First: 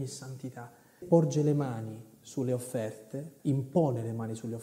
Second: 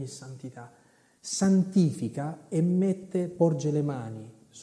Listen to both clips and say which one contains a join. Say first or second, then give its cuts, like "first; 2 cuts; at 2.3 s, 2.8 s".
first; 2 cuts; at 1.0 s, 3.4 s